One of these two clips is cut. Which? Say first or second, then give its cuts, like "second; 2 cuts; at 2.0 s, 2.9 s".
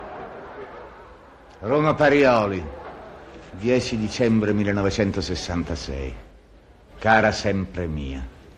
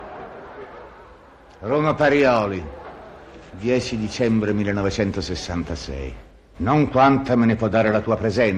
second; 1 cut; at 6.6 s